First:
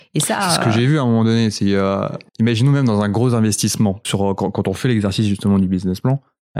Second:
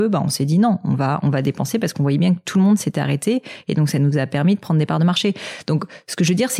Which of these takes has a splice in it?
first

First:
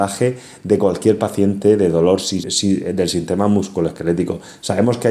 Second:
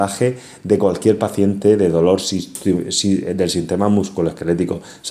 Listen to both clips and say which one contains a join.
first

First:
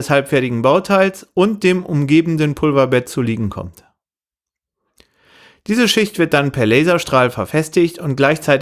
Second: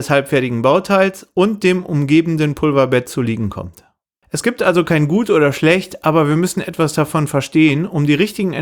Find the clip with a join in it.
second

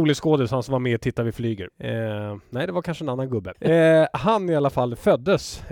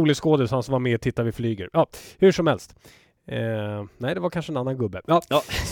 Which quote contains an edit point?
first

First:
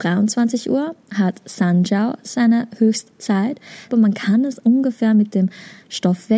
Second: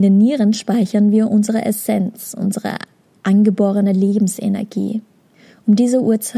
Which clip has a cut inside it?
first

